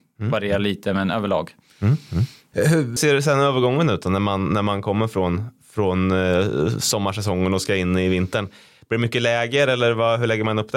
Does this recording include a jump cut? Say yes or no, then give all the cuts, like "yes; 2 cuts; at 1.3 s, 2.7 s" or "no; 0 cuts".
yes; 1 cut; at 3.0 s